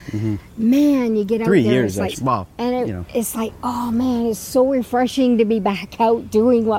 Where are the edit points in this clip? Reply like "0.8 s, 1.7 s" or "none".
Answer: 2.1 s